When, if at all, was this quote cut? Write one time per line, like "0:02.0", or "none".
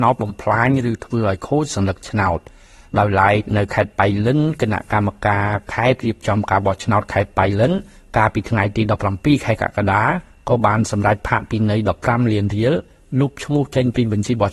none